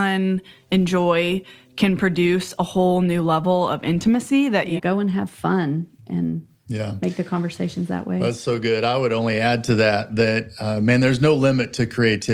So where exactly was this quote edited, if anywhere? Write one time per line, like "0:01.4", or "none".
0:04.8